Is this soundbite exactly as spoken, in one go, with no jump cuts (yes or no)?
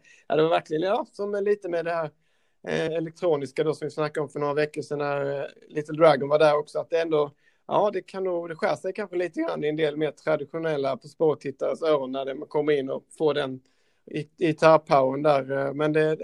yes